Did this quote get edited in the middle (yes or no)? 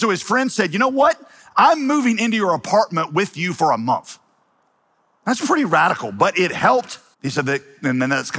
yes